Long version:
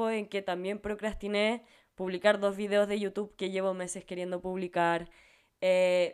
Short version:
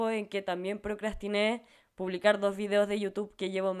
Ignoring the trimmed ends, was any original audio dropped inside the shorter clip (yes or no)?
no